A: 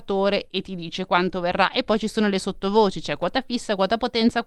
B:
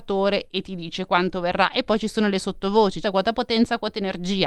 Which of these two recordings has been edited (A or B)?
B